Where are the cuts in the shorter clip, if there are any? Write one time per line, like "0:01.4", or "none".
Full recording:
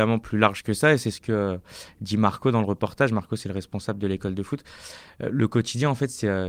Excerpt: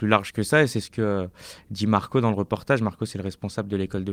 none

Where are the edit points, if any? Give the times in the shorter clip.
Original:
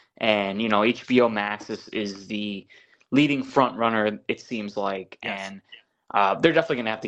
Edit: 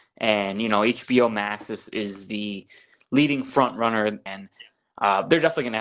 0:04.3

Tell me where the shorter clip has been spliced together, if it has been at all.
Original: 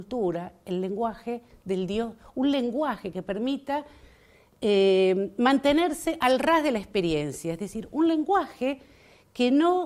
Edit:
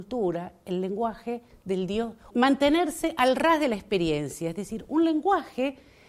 0:02.3

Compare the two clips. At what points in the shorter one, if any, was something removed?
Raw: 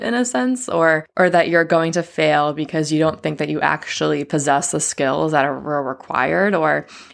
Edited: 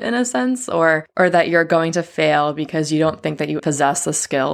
0:03.6

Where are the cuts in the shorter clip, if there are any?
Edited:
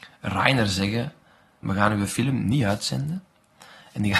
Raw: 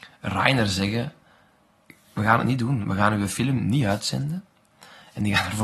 0:01.6

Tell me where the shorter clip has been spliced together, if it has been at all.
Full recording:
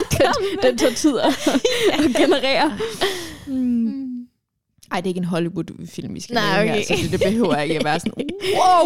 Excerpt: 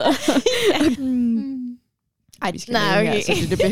0:01.0
0:02.5

